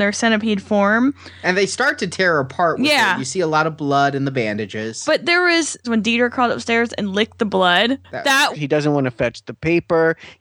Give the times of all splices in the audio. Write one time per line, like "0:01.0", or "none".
0:05.8
0:08.5